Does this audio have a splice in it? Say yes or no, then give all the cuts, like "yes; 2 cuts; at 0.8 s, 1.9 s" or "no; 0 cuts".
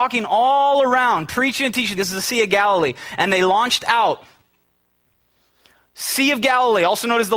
yes; 1 cut; at 2.0 s